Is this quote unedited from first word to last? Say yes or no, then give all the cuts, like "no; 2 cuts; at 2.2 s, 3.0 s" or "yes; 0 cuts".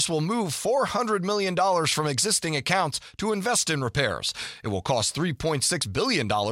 yes; 0 cuts